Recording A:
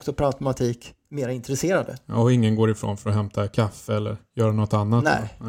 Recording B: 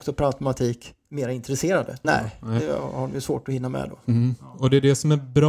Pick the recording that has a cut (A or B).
B